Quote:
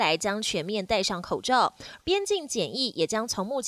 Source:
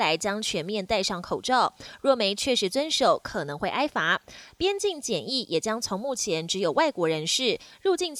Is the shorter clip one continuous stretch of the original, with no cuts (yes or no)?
no